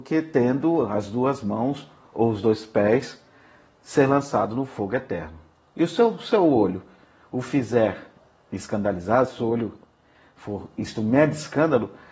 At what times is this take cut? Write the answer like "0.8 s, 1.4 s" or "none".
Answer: none